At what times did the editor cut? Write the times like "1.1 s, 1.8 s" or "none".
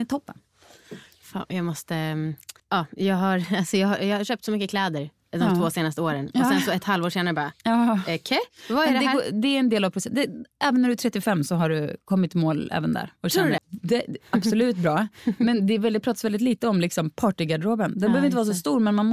2.6 s, 7.6 s, 13.6 s